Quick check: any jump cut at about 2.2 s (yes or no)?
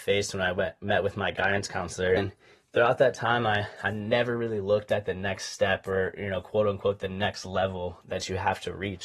yes